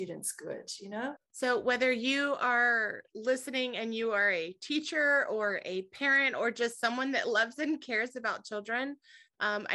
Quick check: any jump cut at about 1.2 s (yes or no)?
yes